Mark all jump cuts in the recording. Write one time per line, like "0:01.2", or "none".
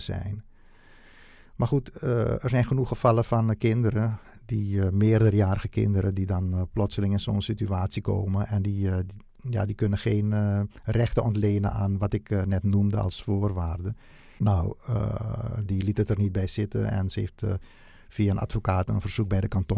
0:14.4
0:15.6